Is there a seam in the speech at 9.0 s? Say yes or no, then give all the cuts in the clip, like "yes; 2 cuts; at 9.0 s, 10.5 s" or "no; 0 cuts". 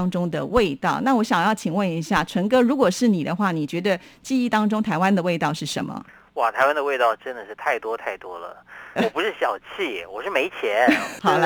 yes; 1 cut; at 9.0 s